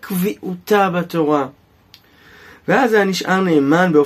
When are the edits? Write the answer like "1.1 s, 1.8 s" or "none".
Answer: none